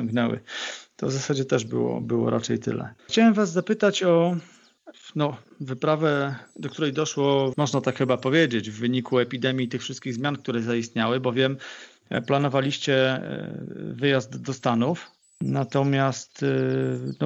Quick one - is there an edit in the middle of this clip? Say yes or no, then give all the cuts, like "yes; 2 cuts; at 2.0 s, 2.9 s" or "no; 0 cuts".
yes; 2 cuts; at 3.0 s, 7.5 s